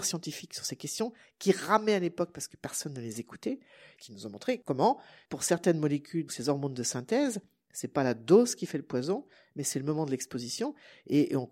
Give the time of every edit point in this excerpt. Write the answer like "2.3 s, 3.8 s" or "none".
6.3 s